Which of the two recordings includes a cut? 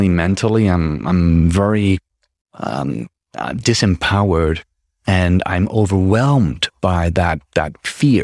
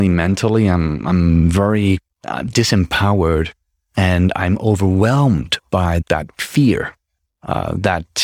second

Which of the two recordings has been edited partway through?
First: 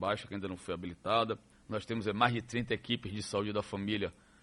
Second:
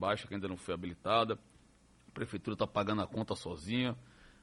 first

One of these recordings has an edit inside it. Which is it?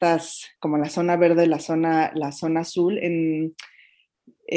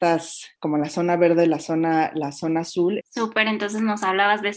second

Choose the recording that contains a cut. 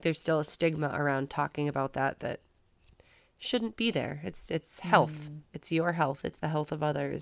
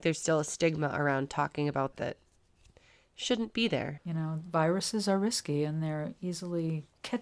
second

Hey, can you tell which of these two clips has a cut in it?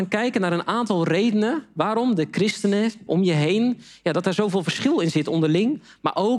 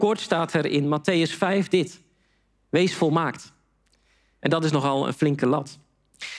first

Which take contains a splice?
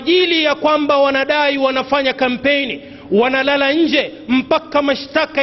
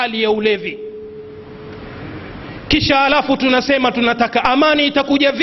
second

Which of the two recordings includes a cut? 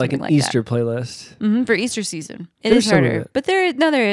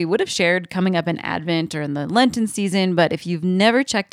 first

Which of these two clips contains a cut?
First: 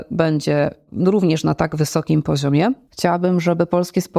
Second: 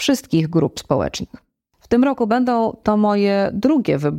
first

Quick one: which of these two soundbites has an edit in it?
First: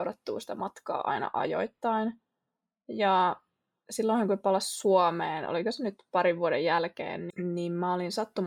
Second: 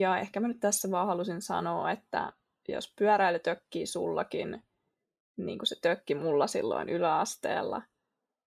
first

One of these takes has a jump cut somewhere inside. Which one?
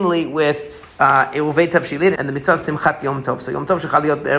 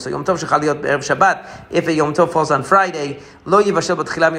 first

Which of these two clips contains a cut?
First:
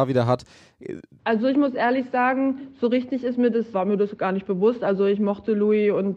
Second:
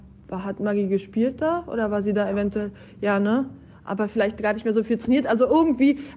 first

